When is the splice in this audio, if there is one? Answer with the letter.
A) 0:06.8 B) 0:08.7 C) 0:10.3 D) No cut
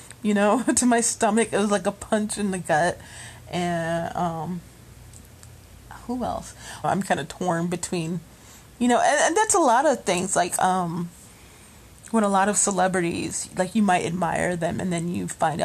A